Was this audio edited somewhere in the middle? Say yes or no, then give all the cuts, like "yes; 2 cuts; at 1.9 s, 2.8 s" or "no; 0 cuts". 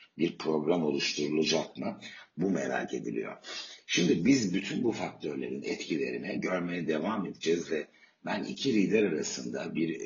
no; 0 cuts